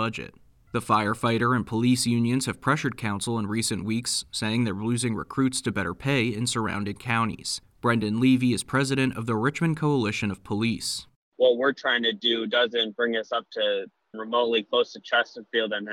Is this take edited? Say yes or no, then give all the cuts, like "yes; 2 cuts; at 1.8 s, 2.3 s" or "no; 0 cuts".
yes; 1 cut; at 14.1 s